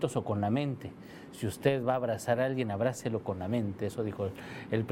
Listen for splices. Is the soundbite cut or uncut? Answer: uncut